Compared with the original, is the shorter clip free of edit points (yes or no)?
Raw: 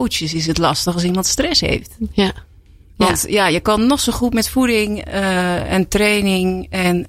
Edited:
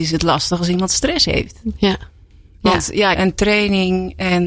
no